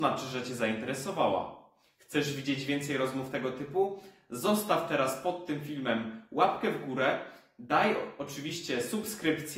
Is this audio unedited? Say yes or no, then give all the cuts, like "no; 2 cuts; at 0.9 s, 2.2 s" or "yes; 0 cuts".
yes; 0 cuts